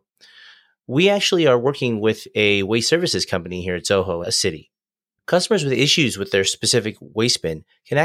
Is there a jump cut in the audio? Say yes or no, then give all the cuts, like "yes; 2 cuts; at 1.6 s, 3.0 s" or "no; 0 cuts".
yes; 1 cut; at 4.2 s